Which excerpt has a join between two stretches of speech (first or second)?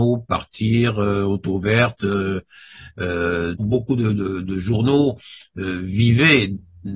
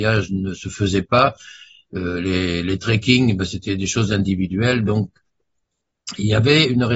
first